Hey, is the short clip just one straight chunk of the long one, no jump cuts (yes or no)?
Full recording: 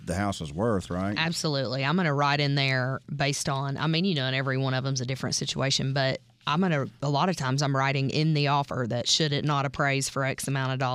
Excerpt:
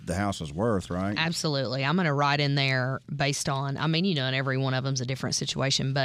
yes